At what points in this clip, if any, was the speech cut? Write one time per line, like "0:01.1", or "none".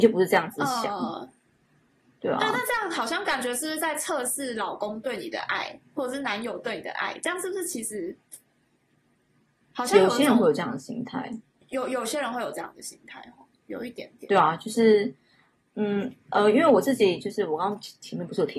0:11.6

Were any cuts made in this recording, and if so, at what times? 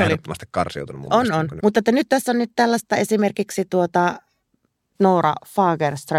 0:01.6

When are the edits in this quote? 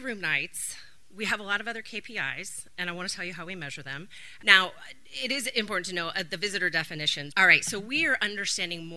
0:04.4
0:07.3

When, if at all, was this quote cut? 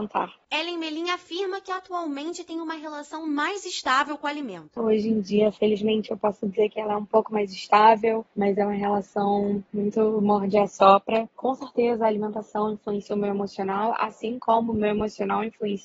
0:04.8

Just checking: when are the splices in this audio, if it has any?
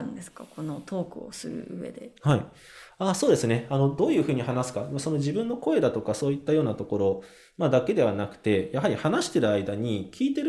none

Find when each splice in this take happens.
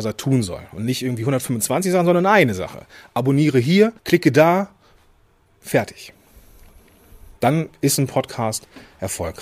0:04.0
0:07.4

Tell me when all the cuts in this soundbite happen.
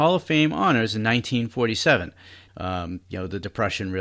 0:02.5

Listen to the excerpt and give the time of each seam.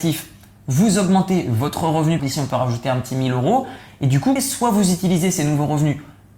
0:02.2
0:04.4

